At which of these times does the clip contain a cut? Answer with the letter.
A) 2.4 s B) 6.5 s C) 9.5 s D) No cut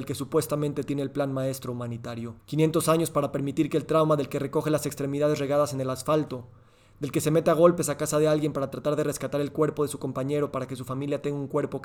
A